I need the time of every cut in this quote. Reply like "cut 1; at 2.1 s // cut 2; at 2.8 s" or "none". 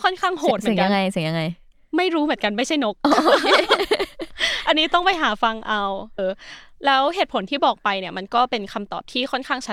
cut 1; at 6.2 s